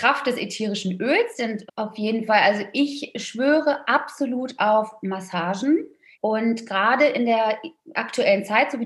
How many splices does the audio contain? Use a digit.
2